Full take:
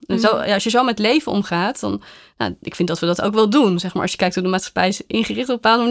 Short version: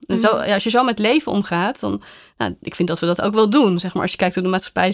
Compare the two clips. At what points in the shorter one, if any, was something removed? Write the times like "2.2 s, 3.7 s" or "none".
none